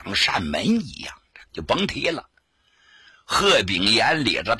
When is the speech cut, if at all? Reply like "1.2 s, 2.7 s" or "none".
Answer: 1.5 s